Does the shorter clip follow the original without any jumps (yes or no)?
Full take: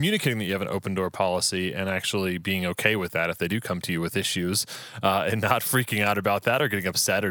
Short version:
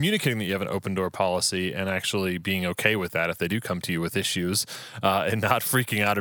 yes